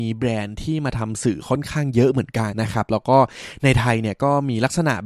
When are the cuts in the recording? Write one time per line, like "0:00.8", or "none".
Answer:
0:02.5

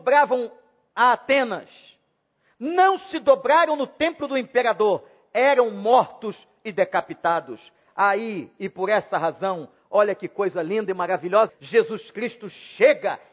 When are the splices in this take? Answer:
0:11.5

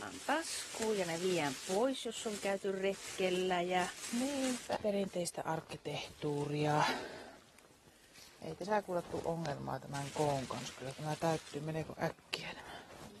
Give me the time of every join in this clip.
0:04.8
0:08.4

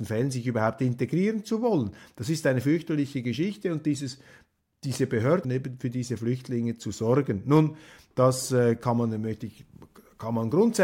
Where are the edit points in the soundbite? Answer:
0:05.4

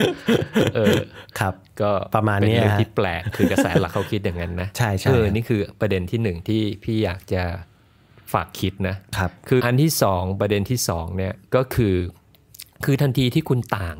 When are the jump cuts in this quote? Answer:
0:09.6
0:11.5

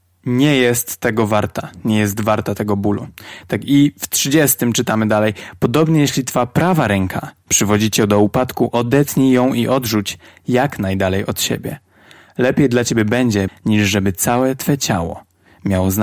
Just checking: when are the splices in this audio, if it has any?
0:13.5

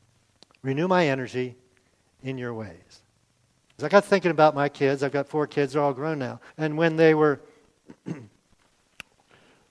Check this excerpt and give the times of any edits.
0:03.8
0:06.5

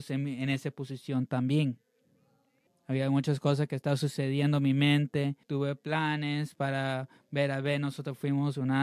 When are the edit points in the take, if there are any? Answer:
0:02.7
0:05.4

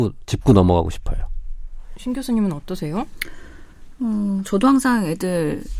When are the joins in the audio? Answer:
none

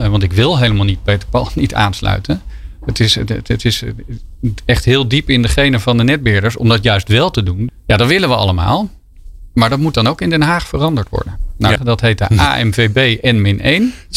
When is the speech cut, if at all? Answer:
0:07.7
0:11.8

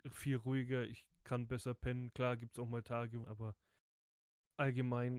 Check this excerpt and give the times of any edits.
0:03.2

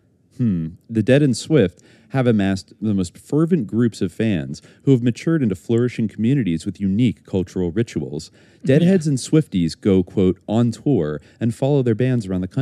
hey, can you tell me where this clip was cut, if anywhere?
none

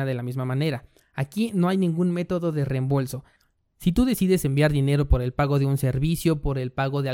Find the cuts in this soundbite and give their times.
none

